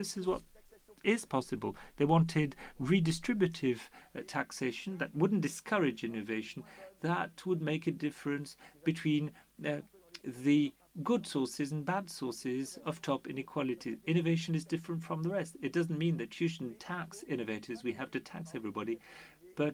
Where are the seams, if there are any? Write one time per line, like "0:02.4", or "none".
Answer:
none